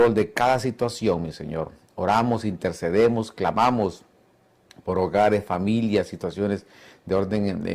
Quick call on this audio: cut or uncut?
uncut